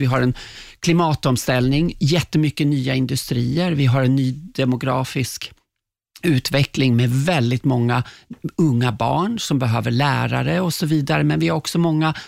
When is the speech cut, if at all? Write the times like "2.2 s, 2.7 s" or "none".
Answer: none